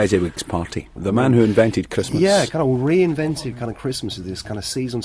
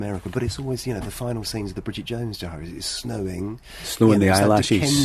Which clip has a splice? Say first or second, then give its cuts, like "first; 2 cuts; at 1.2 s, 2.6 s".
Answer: first; 1 cut; at 1.0 s